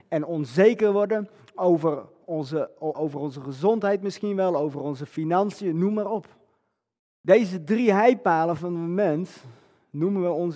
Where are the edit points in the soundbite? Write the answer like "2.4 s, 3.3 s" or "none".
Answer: 2.9 s, 7.0 s